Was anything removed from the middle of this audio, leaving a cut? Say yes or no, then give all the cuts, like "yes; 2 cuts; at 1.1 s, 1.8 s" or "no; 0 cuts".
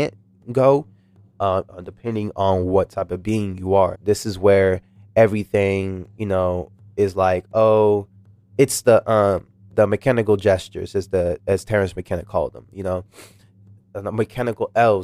yes; 2 cuts; at 1.7 s, 3.9 s